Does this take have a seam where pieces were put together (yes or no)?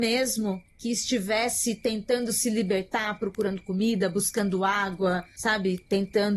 no